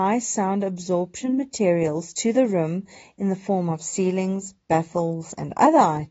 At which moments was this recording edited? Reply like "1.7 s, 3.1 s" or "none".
none